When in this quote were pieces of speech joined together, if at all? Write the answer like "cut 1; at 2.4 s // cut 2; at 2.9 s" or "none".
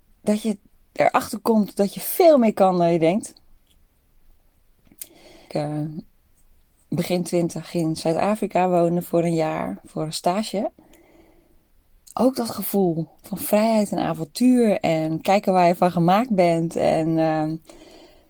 cut 1; at 5.5 s